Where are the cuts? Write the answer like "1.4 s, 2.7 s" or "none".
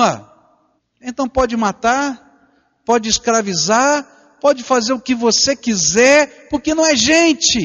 none